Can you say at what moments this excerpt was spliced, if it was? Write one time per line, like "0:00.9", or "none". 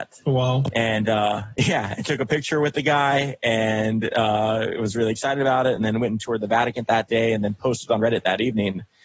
none